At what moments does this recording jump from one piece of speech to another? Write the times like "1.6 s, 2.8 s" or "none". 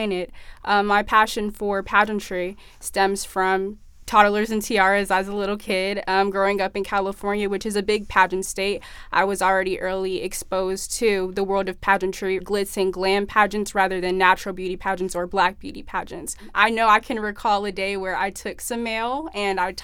12.4 s